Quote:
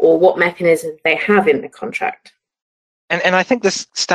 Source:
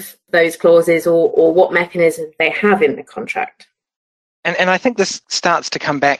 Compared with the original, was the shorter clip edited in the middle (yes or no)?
no